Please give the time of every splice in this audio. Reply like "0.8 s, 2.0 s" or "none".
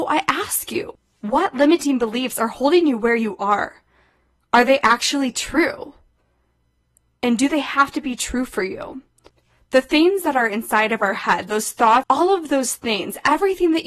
12.0 s